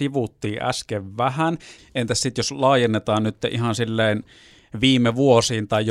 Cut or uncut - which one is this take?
cut